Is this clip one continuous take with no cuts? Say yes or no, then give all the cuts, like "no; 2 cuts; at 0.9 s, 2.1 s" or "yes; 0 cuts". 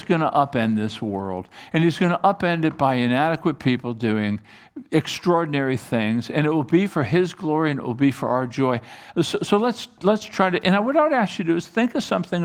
yes; 0 cuts